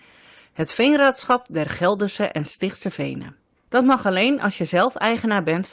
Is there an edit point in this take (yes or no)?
yes